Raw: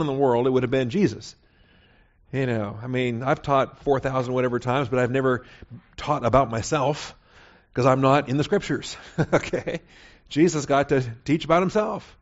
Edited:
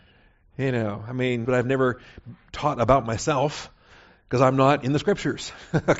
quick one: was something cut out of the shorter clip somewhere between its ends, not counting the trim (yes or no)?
yes